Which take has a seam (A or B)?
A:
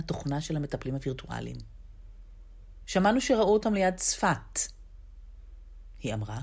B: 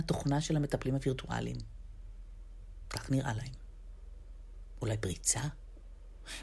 A